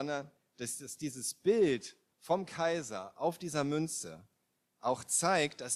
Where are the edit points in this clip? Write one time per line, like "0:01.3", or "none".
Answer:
none